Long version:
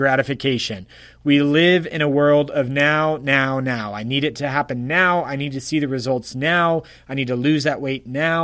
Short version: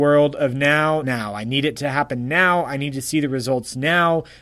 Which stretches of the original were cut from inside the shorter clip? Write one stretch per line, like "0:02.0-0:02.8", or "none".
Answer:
0:03.2-0:03.6